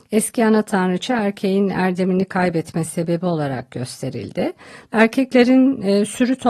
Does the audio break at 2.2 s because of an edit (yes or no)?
no